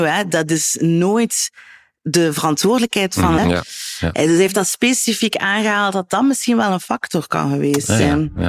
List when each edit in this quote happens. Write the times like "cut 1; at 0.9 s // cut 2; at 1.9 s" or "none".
cut 1; at 3.4 s